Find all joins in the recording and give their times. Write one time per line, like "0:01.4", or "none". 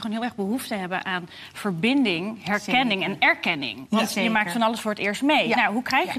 none